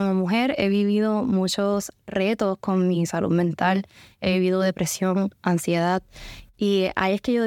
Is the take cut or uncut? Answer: cut